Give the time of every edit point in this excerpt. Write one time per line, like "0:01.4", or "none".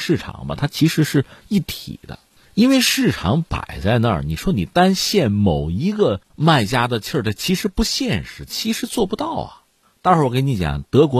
none

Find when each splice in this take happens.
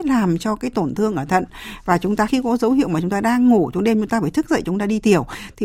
0:02.3

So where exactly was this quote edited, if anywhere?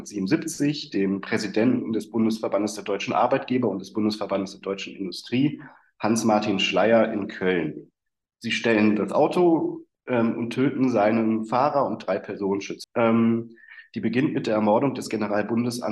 0:09.9
0:12.8

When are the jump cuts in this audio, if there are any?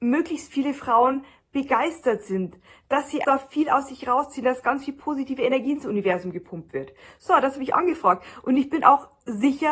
0:03.2

